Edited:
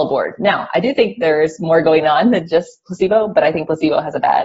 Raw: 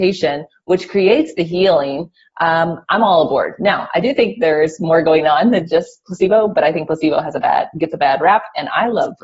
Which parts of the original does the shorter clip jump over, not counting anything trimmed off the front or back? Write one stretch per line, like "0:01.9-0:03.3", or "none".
none